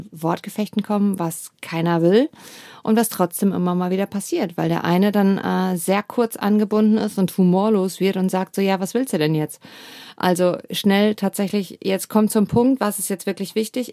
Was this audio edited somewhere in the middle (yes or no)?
no